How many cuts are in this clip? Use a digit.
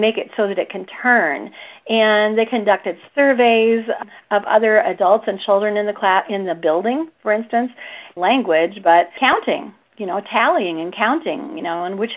1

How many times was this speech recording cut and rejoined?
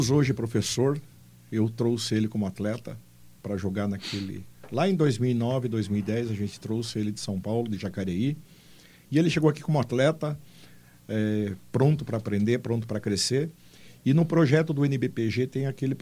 0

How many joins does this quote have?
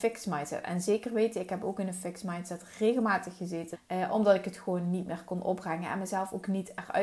1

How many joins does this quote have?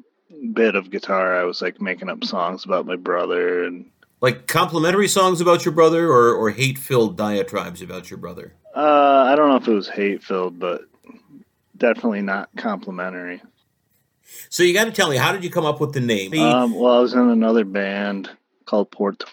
1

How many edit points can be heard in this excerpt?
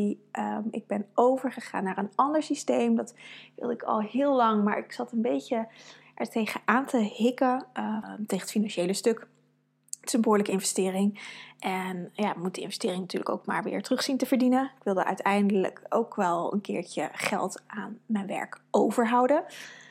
1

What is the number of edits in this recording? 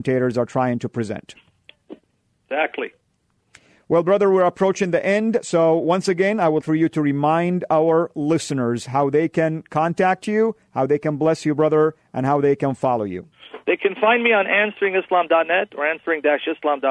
1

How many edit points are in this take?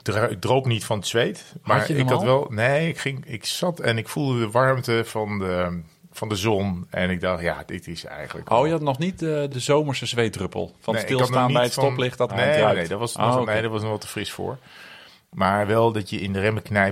2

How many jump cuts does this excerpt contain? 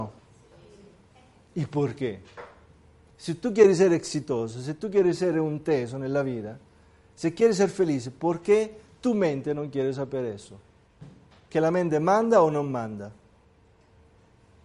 1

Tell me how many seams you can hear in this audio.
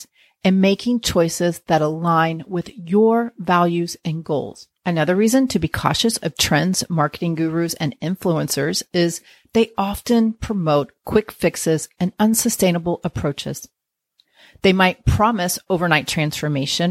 1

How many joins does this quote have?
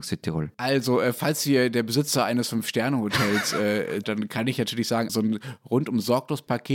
2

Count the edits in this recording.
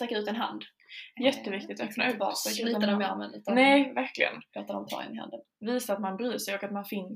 0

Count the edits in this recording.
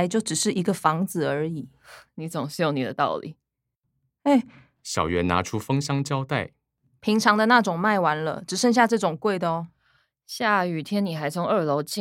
1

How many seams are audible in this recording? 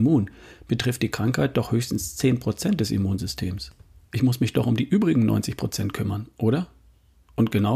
0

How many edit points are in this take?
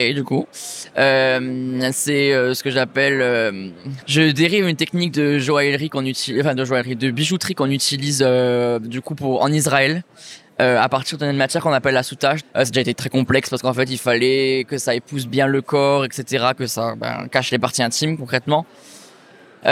2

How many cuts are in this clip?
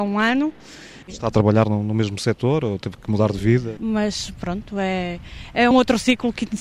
3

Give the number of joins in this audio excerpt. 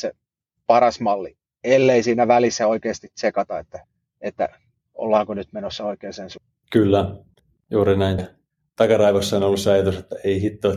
2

